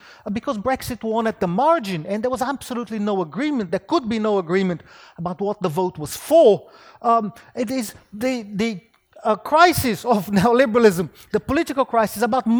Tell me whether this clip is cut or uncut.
uncut